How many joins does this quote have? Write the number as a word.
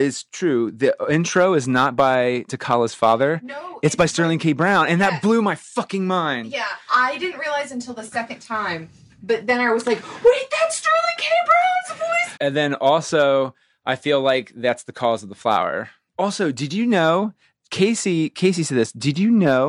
one